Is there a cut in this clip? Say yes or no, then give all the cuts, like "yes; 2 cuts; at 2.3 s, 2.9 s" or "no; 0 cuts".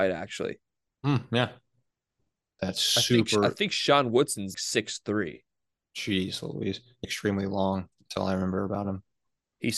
yes; 3 cuts; at 2.6 s, 4.5 s, 7.0 s